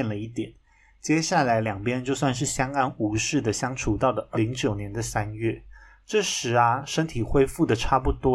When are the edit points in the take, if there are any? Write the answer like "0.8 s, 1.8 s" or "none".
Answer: 4.3 s